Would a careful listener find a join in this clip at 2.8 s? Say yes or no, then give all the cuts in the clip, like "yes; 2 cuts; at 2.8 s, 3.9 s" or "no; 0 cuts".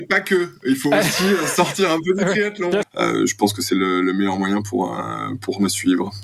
yes; 1 cut; at 2.8 s